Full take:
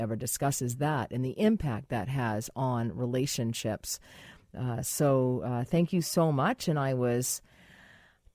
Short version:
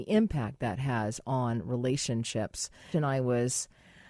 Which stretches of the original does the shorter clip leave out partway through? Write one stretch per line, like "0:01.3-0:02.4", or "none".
0:04.2-0:06.6